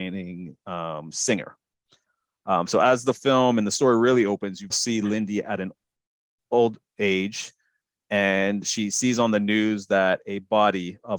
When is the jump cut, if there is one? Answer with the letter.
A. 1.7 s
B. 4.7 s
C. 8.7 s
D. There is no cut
B